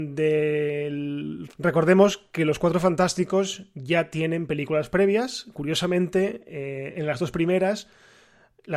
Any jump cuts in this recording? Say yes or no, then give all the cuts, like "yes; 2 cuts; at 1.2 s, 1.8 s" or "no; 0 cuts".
yes; 1 cut; at 1.5 s